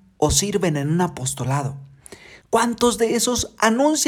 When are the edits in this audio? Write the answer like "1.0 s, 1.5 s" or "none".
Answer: 2.4 s